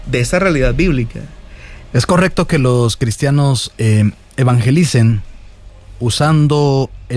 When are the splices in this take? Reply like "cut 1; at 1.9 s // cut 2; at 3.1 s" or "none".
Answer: cut 1; at 1.9 s // cut 2; at 3.7 s